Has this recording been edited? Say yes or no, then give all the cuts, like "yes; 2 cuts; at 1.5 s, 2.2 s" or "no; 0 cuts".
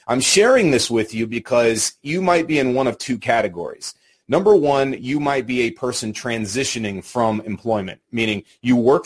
no; 0 cuts